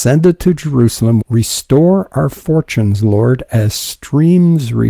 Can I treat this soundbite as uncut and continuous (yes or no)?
no